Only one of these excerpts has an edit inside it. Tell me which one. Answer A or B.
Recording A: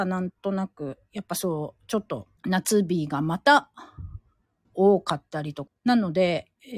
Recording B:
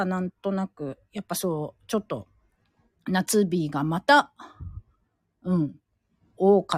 A